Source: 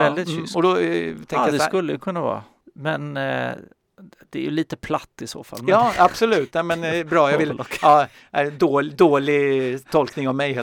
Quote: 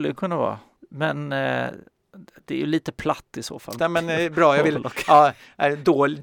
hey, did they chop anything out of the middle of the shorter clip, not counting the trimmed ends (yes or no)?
yes